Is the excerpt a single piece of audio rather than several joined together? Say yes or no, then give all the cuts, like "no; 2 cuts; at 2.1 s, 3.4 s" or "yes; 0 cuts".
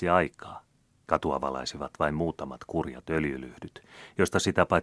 no; 1 cut; at 1.0 s